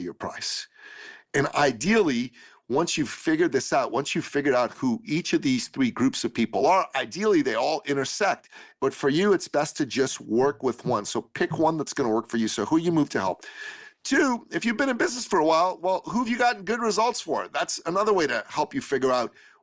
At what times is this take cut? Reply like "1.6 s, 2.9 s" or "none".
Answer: 8.8 s